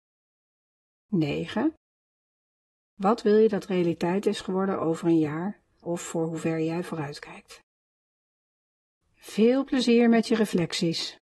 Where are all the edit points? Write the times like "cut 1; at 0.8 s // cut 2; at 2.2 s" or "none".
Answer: cut 1; at 5.8 s // cut 2; at 9.0 s